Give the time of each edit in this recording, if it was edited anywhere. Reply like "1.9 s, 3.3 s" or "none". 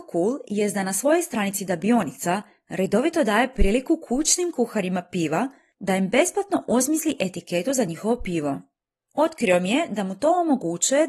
none